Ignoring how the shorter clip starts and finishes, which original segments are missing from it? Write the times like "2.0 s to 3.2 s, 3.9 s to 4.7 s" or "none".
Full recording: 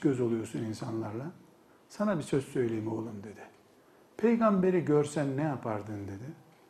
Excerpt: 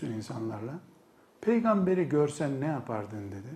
1.8 s to 4.1 s